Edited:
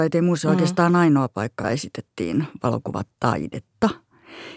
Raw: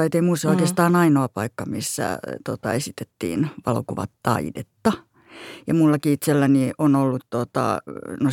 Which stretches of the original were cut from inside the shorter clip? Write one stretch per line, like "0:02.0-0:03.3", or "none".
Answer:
0:01.6-0:02.7